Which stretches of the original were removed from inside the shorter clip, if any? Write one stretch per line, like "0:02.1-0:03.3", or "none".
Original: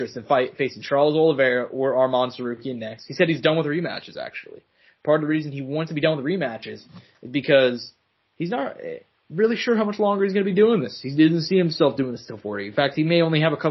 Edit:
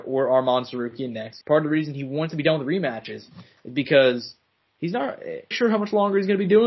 0:03.1-0:05.0
0:09.1-0:09.6